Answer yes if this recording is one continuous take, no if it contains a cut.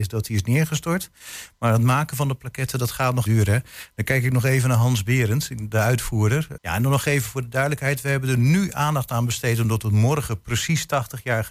no